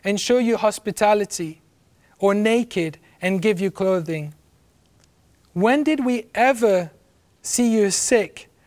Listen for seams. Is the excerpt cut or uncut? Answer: uncut